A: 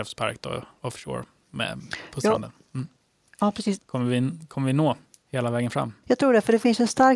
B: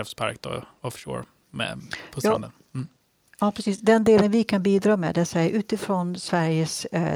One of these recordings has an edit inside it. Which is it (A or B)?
A